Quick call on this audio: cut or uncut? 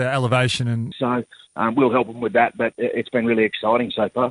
cut